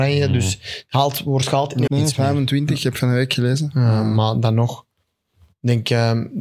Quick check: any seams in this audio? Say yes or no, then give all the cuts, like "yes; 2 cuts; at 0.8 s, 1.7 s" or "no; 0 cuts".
yes; 1 cut; at 1.9 s